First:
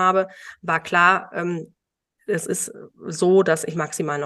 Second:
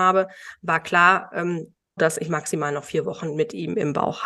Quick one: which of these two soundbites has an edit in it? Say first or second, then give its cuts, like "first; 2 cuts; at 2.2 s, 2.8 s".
second; 1 cut; at 2.0 s